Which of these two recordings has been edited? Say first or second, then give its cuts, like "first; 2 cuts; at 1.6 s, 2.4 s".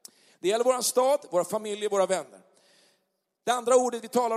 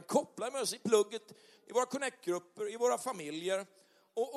second; 1 cut; at 1.6 s